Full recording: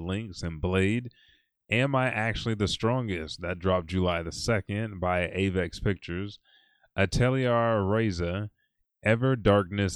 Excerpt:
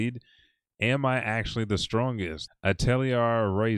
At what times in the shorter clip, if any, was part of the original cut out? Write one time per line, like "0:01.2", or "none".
0:02.5

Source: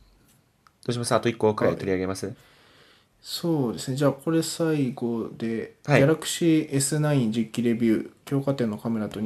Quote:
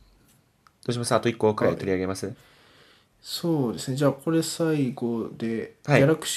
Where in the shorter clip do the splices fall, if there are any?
none

